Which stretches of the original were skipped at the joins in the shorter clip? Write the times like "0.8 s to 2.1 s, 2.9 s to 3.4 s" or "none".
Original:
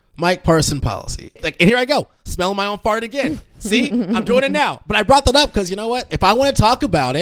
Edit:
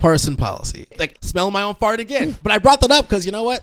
1.6 s to 2.2 s, 3.4 s to 4.8 s